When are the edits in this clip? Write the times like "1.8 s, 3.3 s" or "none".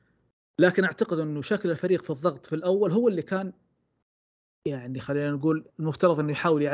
5.7 s